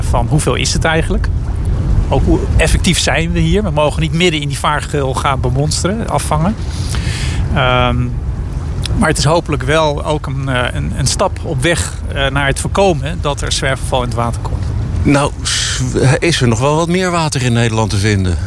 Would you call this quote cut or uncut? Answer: uncut